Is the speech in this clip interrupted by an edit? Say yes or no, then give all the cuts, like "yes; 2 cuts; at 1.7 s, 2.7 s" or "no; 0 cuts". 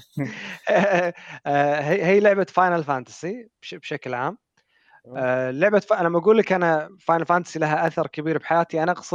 no; 0 cuts